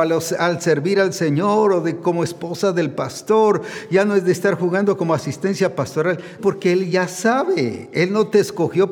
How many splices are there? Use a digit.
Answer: 1